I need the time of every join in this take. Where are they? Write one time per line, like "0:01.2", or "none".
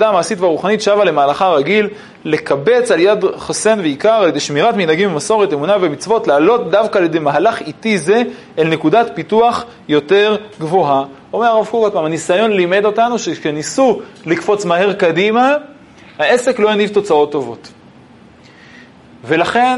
none